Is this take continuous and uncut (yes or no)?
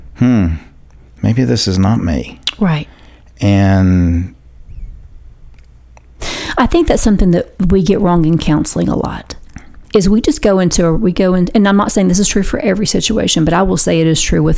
yes